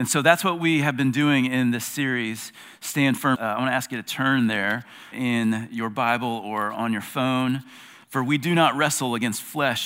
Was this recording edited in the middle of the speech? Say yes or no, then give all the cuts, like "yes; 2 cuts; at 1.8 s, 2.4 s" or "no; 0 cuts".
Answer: yes; 3 cuts; at 3.3 s, 5.1 s, 8.0 s